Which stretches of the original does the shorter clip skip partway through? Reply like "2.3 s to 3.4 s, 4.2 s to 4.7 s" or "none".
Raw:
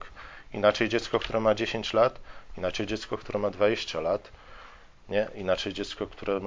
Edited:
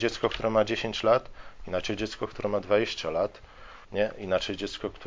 4.7 s to 5.0 s

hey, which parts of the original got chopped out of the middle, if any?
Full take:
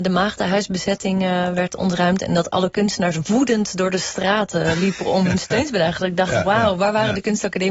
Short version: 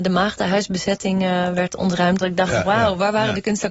2.2 s to 6.0 s

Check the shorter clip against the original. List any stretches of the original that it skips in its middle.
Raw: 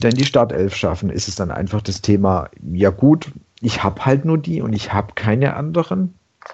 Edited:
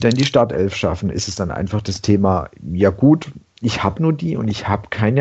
4.0 s to 4.2 s

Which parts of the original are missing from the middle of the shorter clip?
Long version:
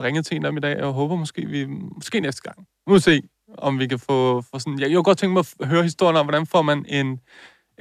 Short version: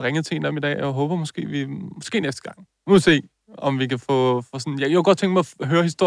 none

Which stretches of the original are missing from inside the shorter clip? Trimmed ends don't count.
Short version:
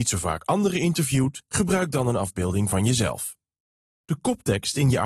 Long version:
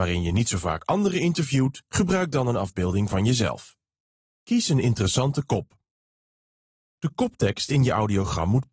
4.3 s to 6.9 s

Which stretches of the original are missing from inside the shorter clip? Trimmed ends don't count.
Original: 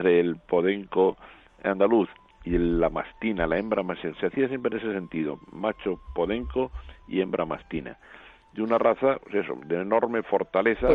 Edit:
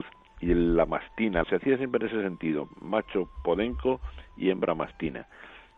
3.5 s to 4.1 s

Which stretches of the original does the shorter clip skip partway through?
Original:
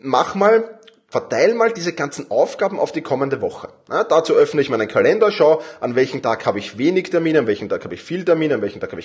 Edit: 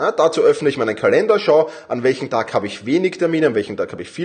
none

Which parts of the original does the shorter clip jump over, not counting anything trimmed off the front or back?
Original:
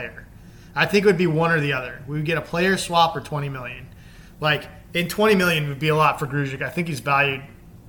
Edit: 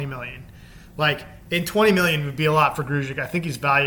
none

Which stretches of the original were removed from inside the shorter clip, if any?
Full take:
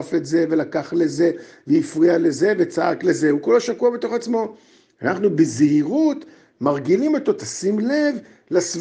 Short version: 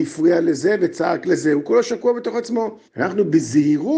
4.6 s to 4.9 s

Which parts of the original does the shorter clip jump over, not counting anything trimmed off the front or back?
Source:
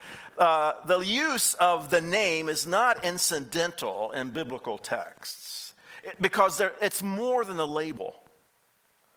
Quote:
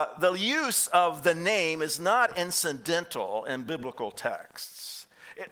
none

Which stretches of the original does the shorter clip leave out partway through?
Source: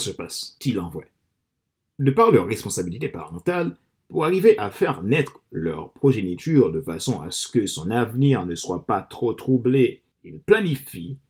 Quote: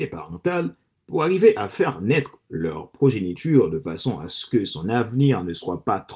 none

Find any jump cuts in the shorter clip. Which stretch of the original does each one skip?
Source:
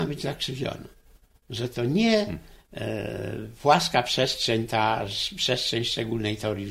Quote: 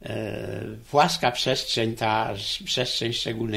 none

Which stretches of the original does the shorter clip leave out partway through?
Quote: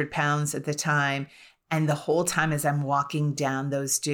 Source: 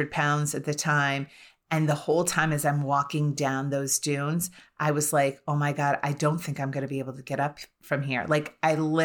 none

